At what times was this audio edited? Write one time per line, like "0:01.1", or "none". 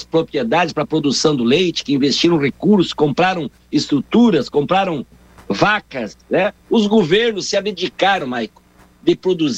0:05.1
0:06.6
0:08.2